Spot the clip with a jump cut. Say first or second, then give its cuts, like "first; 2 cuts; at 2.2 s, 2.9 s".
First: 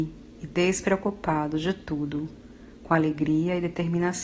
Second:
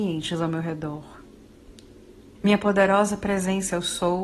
second; 1 cut; at 2.4 s